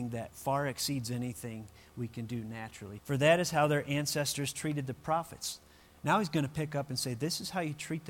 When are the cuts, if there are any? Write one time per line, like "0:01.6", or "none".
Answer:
0:03.0

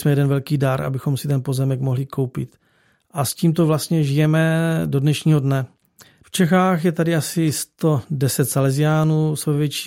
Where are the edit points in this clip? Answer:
0:06.2

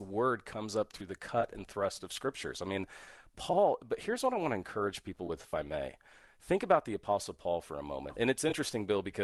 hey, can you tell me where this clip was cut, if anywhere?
none

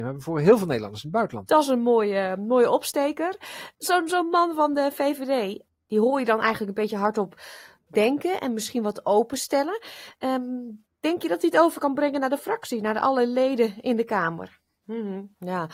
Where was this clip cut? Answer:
0:01.5
0:14.7

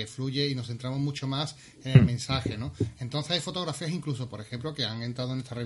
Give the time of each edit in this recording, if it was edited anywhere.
none

